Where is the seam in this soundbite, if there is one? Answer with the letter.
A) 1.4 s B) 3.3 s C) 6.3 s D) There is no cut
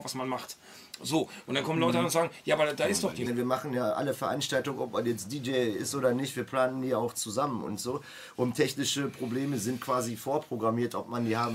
B